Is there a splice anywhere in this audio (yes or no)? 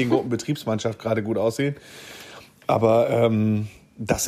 no